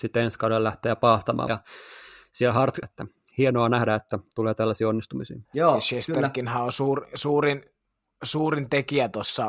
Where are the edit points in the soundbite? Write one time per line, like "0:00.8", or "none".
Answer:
0:01.5
0:02.8
0:05.5